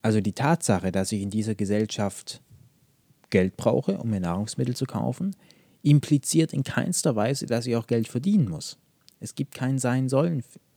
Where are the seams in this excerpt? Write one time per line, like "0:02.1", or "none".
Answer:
none